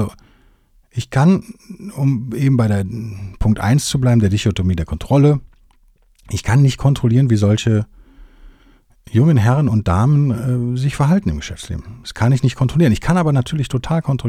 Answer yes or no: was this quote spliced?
no